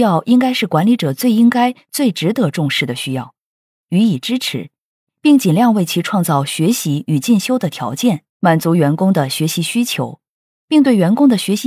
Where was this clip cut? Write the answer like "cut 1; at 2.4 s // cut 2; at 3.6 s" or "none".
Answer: cut 1; at 3.8 s // cut 2; at 8.3 s